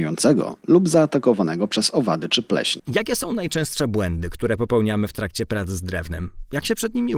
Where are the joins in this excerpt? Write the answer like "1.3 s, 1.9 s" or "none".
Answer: 2.8 s